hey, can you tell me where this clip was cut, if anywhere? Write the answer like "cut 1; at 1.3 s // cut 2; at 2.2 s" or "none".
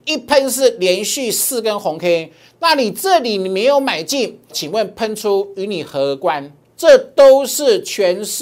cut 1; at 4.5 s // cut 2; at 6.7 s